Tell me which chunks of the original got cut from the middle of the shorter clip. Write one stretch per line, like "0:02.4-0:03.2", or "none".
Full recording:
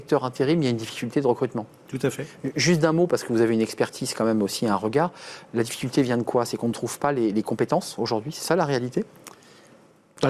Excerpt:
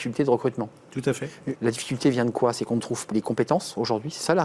0:02.5-0:05.5
0:07.0-0:07.3